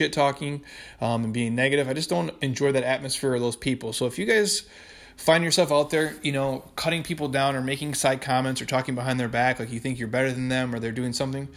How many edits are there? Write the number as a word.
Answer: zero